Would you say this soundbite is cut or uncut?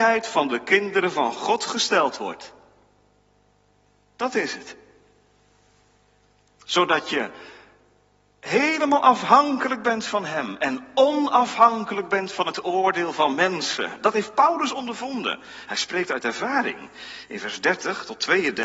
uncut